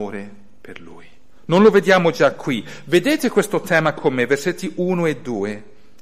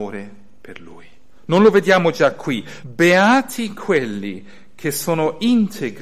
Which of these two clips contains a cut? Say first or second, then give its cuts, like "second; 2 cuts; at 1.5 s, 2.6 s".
second; 1 cut; at 2.8 s